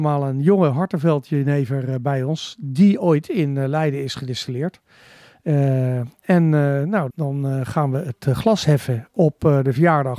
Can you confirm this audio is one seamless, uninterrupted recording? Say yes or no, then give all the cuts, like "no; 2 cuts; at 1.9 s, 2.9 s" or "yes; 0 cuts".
no; 1 cut; at 7.1 s